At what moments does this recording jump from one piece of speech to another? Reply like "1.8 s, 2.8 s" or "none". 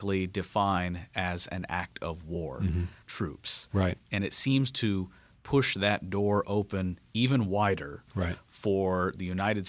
3.0 s